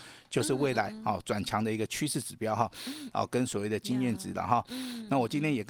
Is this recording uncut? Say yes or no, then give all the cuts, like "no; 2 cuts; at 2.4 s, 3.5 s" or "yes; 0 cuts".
no; 1 cut; at 3.1 s